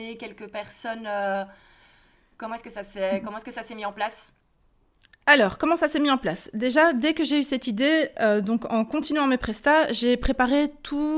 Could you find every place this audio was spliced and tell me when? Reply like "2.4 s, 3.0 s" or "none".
none